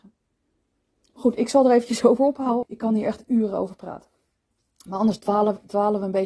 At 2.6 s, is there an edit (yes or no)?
yes